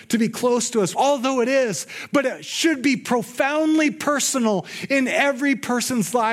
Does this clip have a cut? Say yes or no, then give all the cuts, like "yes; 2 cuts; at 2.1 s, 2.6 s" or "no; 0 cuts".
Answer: yes; 1 cut; at 0.9 s